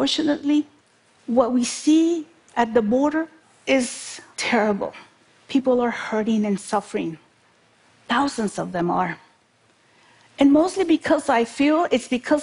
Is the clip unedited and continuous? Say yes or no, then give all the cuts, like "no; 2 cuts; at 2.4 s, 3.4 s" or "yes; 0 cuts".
yes; 0 cuts